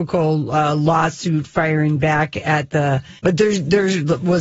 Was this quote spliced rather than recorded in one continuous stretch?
yes; 1 cut; at 3.2 s

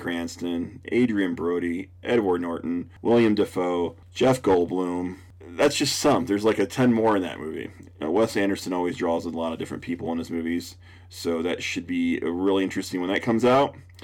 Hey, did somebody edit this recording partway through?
no; 0 cuts

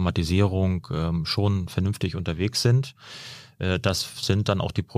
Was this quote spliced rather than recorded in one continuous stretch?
no; 0 cuts

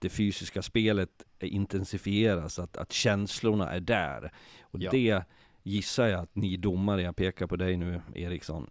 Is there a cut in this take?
no; 0 cuts

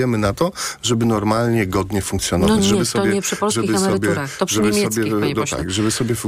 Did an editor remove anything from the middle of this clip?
no; 0 cuts

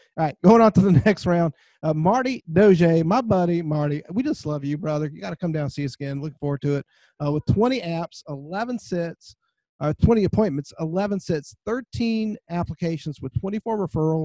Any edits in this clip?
no; 0 cuts

